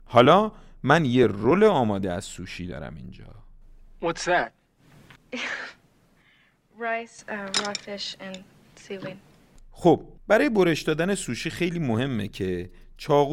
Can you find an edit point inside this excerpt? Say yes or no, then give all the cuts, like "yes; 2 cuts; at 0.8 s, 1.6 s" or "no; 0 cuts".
yes; 2 cuts; at 5.2 s, 10.2 s